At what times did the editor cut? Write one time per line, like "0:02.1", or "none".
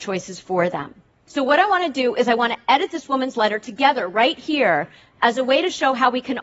0:01.3